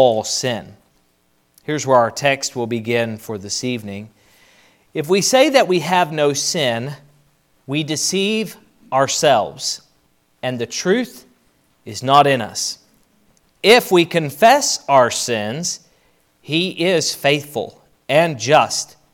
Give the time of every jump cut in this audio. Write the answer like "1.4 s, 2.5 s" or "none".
none